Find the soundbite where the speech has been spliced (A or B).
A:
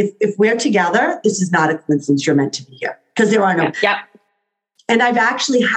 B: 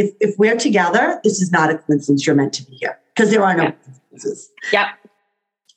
A